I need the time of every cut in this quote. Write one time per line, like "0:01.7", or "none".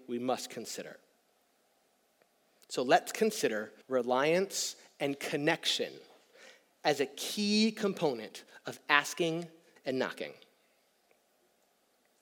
0:03.8
0:09.8